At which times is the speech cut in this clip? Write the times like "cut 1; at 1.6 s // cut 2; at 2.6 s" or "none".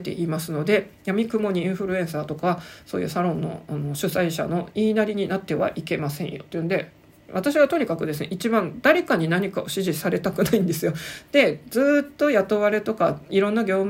none